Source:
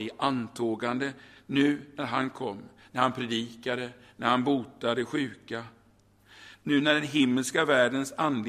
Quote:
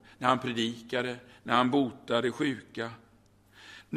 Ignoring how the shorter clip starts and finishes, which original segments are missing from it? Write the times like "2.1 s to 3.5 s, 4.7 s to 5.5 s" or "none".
none